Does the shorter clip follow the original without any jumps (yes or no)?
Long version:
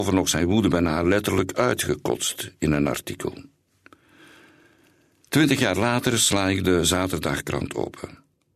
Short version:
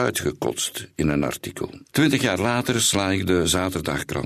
no